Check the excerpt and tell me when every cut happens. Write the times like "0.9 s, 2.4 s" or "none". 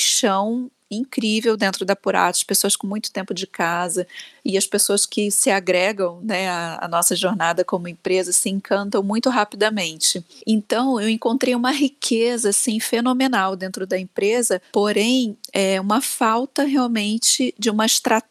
none

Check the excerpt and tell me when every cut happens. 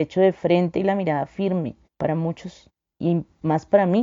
1.9 s

